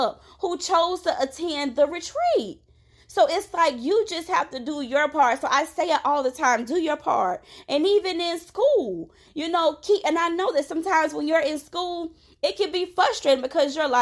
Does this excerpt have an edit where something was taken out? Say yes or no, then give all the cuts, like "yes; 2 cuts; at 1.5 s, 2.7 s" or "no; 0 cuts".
no; 0 cuts